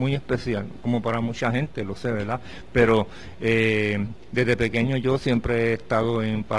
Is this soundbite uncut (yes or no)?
yes